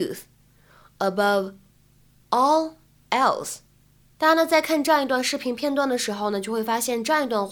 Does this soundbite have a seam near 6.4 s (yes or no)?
no